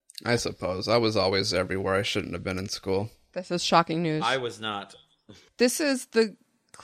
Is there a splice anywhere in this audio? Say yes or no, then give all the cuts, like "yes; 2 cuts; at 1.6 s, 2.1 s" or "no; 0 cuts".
yes; 1 cut; at 5.5 s